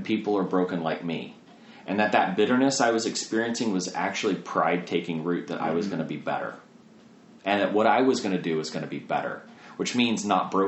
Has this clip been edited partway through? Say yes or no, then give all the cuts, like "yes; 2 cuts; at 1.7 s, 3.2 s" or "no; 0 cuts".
no; 0 cuts